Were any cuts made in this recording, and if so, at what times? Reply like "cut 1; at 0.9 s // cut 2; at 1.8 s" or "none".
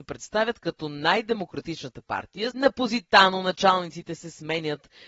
cut 1; at 2.5 s